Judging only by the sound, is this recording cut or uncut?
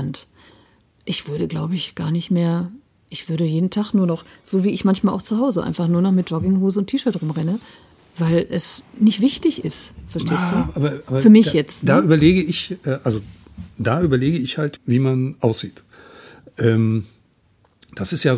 cut